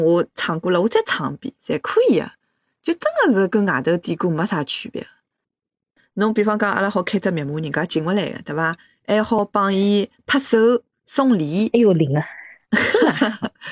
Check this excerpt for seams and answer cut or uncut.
uncut